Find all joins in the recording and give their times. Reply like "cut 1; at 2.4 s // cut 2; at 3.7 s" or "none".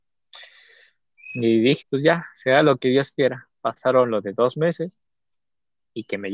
cut 1; at 1.8 s